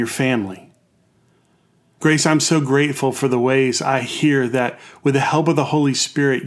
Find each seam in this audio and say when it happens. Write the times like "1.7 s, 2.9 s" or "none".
2.0 s